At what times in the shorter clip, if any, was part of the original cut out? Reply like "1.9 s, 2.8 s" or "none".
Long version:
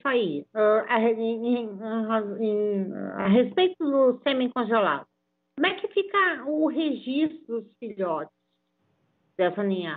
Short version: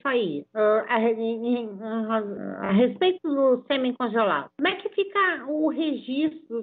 2.4 s, 4.5 s